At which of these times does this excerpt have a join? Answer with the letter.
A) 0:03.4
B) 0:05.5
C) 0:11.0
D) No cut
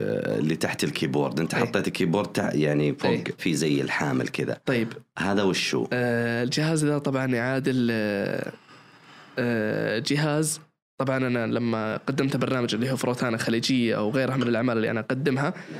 A